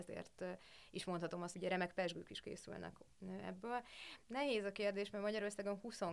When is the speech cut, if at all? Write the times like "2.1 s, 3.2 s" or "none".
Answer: 1.5 s, 4.2 s